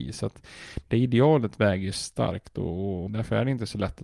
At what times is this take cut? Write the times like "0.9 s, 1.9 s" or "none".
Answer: 3.1 s